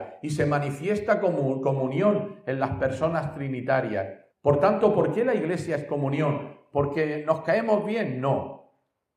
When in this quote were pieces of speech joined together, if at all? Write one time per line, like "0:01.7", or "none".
0:04.3

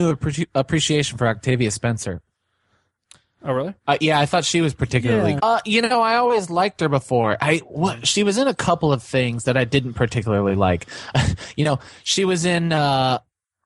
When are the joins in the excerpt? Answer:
0:03.8
0:05.4

